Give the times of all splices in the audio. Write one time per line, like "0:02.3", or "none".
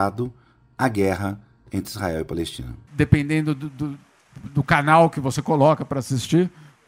none